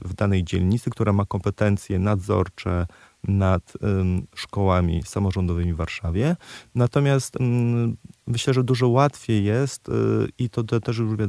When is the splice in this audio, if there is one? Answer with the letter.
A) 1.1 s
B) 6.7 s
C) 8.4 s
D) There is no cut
D